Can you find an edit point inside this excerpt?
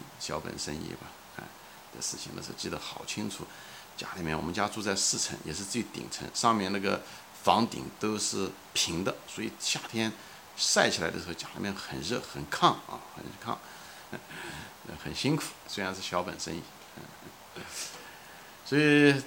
yes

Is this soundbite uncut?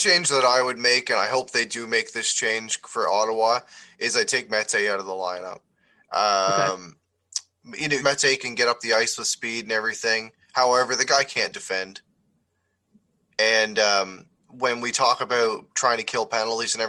no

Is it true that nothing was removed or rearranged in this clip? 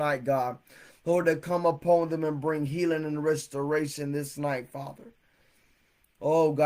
yes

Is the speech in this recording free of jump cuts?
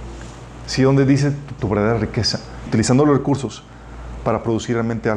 no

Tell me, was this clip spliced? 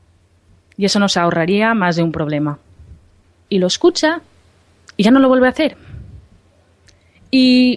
yes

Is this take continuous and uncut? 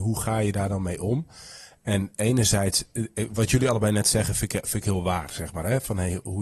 yes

